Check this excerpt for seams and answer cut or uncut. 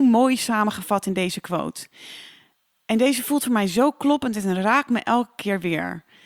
uncut